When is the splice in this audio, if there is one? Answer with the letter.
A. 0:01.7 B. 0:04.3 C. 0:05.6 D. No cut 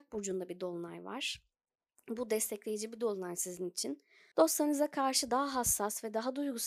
B